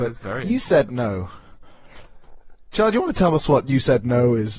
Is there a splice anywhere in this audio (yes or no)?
no